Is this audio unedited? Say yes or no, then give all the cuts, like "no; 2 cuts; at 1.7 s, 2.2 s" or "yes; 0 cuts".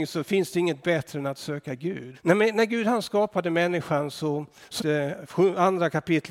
no; 2 cuts; at 2.1 s, 4.8 s